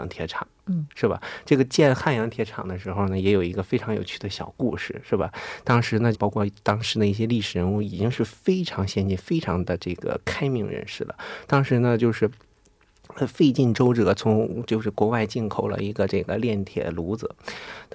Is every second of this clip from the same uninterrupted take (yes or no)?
no